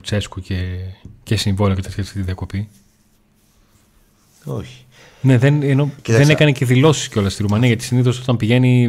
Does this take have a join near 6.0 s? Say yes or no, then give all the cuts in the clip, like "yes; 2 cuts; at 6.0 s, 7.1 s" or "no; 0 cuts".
yes; 1 cut; at 6.0 s